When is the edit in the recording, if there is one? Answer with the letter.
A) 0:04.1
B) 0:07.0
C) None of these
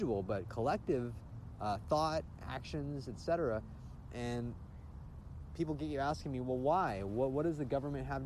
A